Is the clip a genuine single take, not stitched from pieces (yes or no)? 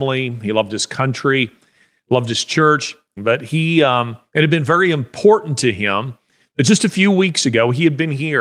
no